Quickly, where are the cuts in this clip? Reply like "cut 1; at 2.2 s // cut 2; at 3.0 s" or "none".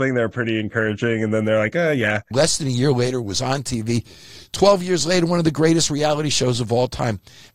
cut 1; at 2.3 s

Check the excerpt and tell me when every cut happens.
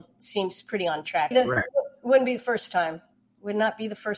cut 1; at 1.3 s

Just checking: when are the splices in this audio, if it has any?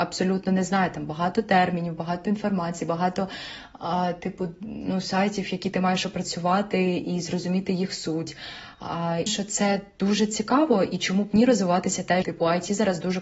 cut 1; at 9.3 s // cut 2; at 12.2 s

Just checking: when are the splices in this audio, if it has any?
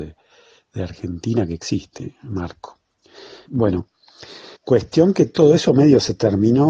cut 1; at 3.5 s // cut 2; at 4.5 s

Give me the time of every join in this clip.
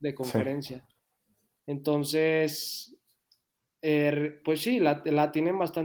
none

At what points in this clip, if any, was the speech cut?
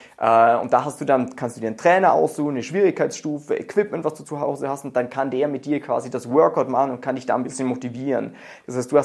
none

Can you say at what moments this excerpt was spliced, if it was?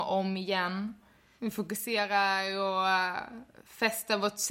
cut 1; at 1.4 s

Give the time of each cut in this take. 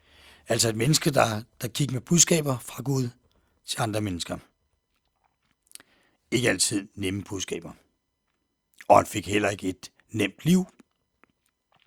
none

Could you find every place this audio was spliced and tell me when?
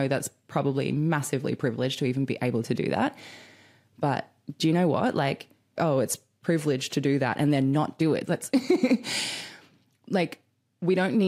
cut 1; at 5.8 s // cut 2; at 8.2 s

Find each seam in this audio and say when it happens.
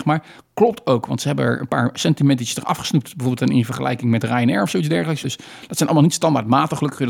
cut 1; at 5.2 s

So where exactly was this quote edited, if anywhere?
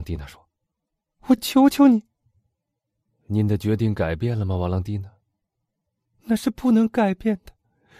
none

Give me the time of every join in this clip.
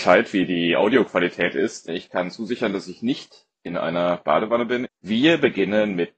cut 1; at 1.9 s // cut 2; at 4.8 s

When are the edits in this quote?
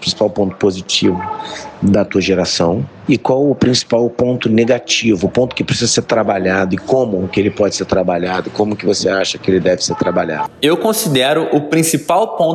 cut 1; at 3.1 s

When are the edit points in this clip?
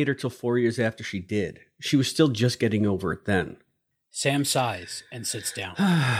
none

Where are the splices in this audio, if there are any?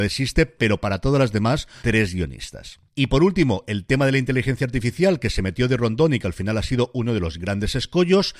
cut 1; at 1.8 s

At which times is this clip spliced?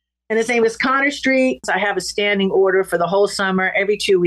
cut 1; at 1.6 s

